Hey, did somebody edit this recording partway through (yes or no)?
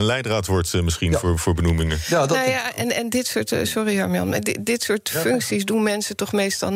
no